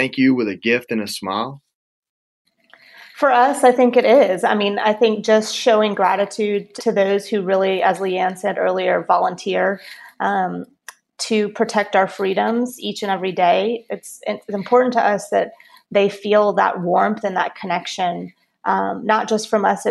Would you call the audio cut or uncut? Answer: cut